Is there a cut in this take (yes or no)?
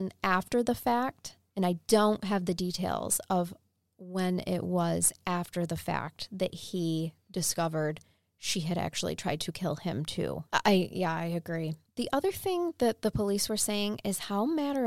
yes